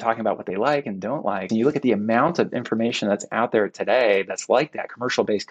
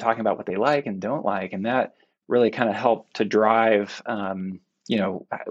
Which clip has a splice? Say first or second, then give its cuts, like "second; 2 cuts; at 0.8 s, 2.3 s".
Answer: first; 1 cut; at 1.5 s